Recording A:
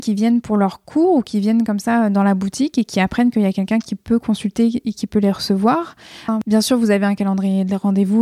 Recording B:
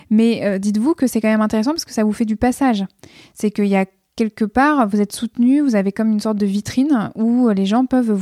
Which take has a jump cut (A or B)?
A